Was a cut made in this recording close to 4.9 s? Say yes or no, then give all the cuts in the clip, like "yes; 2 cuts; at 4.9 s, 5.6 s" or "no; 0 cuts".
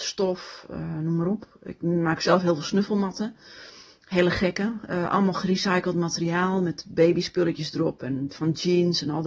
no; 0 cuts